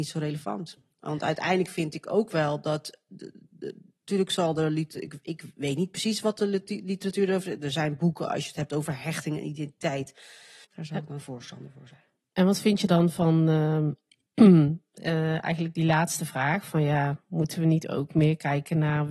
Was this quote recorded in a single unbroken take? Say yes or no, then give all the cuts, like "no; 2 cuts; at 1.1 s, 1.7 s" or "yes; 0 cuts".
no; 1 cut; at 10.6 s